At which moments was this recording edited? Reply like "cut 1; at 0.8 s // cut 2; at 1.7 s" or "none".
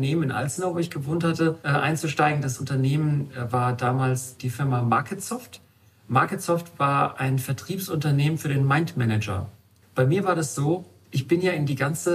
cut 1; at 9.8 s